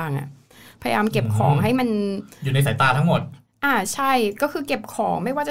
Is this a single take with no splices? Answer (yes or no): yes